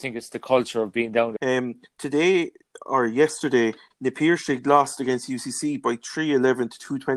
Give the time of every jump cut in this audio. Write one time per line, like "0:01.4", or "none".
0:01.4
0:03.9